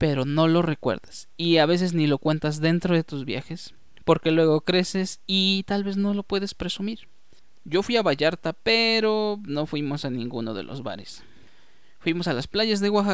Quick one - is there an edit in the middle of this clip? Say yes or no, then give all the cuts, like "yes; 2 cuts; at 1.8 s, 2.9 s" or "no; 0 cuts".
no; 0 cuts